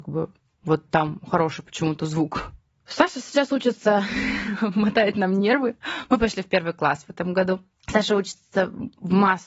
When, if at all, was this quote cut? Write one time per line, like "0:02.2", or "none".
none